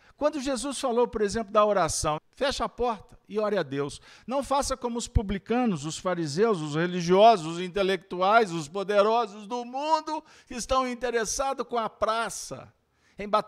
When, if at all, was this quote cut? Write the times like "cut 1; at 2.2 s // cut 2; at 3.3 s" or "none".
cut 1; at 2.2 s